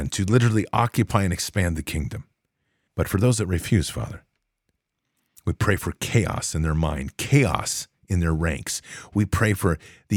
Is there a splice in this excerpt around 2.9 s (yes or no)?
yes